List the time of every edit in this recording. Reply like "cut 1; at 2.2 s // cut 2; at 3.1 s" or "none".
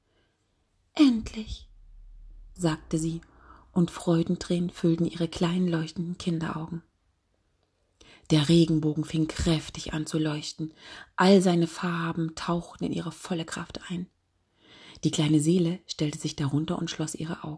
cut 1; at 2.5 s